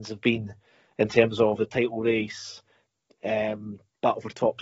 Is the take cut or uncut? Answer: uncut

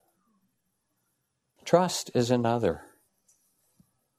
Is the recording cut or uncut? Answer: cut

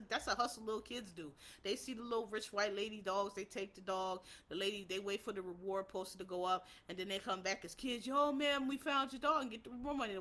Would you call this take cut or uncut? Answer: uncut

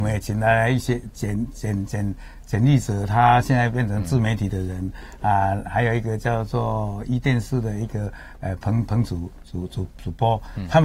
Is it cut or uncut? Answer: uncut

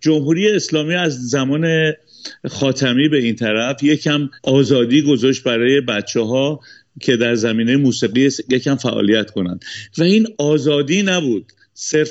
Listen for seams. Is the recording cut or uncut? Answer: cut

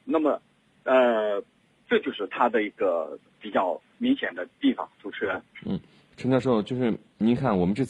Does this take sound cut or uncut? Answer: uncut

